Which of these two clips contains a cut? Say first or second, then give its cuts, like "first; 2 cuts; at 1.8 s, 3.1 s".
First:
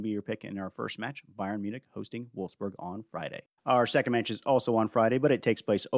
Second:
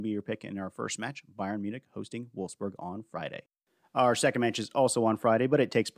first; 1 cut; at 3.6 s